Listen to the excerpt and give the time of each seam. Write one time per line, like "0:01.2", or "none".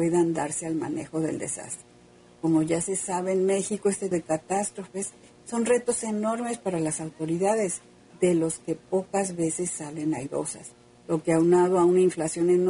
0:04.1